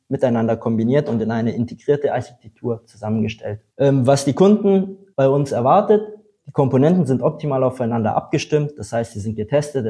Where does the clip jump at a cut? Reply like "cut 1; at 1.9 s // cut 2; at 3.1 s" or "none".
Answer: cut 1; at 3.7 s